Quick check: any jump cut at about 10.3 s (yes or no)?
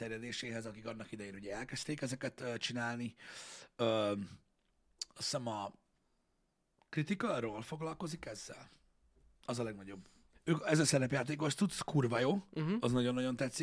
yes